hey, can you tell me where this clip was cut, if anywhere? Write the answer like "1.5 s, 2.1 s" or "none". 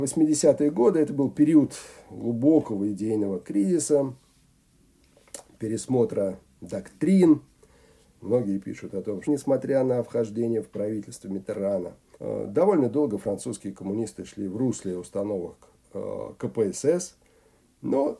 8.1 s, 9.2 s, 12.1 s